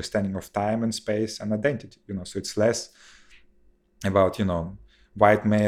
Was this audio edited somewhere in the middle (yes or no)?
no